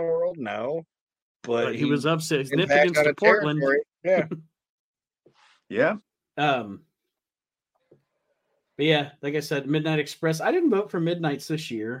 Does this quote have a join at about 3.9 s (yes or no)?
yes